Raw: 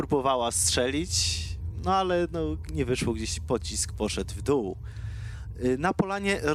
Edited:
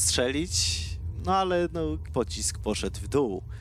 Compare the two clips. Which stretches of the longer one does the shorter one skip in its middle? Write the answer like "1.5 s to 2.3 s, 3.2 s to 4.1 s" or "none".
2.7 s to 3.4 s